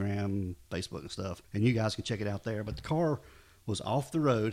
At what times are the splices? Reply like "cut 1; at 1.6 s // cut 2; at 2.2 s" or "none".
cut 1; at 1.4 s